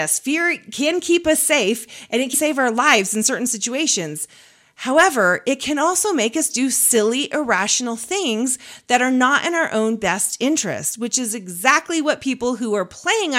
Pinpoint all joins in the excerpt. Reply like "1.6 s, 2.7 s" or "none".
2.3 s